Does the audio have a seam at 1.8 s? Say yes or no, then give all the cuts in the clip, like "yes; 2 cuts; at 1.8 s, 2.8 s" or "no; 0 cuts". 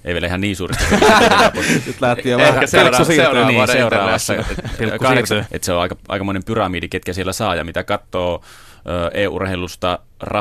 no; 1 cut; at 5.5 s